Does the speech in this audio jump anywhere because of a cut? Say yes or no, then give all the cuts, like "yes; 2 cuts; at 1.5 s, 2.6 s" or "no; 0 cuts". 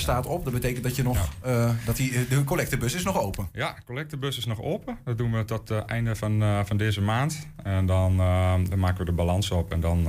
no; 0 cuts